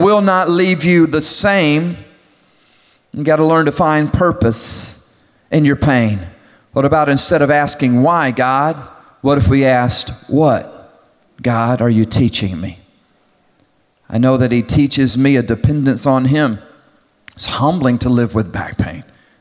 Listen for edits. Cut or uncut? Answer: uncut